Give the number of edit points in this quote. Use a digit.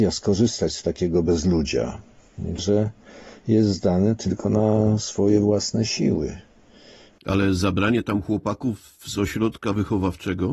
2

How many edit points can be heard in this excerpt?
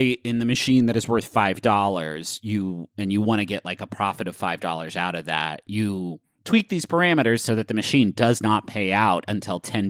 0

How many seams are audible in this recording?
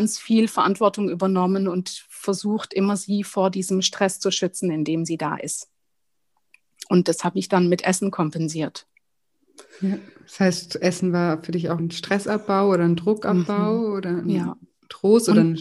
1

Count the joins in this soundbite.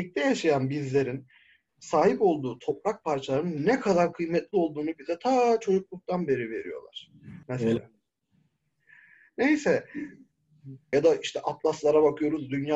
2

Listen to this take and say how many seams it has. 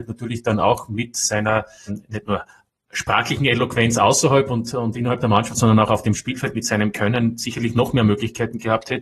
1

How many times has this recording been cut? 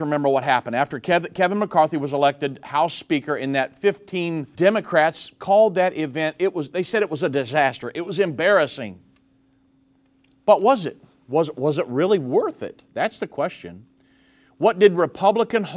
1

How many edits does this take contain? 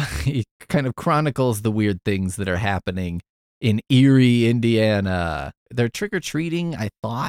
1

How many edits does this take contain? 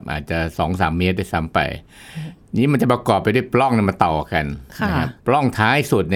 1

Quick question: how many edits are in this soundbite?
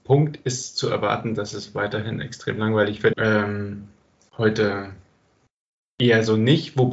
1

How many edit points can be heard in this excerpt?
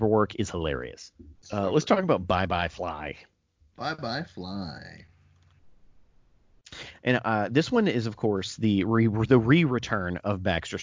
1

